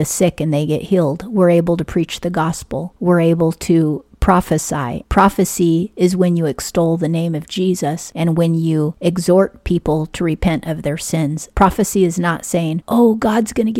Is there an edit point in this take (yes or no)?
yes